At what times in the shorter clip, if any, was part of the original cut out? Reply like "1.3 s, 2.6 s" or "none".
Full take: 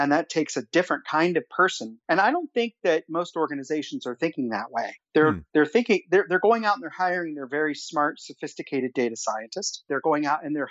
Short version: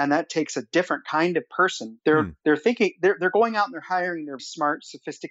2.0 s, 4.4 s